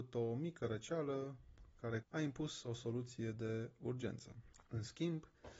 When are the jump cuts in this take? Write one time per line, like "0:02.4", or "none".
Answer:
0:02.0

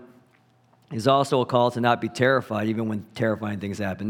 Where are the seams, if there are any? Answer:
none

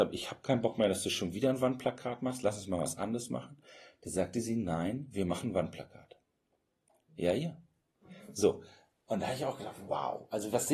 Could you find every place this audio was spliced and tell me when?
0:07.1

